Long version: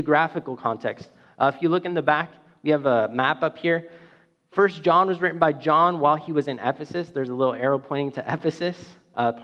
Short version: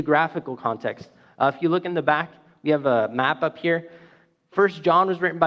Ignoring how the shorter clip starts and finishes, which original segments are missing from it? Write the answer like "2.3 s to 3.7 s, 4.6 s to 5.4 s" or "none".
none